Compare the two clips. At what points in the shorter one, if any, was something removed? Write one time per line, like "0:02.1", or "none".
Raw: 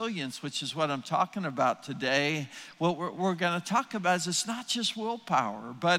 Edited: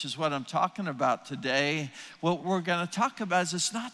0:02.4

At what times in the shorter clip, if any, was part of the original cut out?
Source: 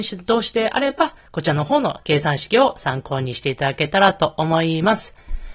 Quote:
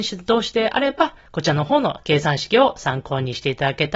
none

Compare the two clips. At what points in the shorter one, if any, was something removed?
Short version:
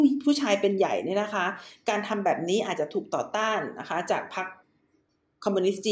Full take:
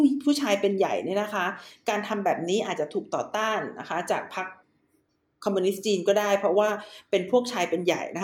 none

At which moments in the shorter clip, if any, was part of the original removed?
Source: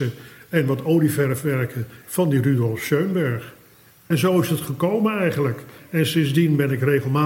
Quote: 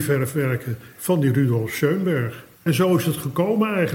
0:02.5

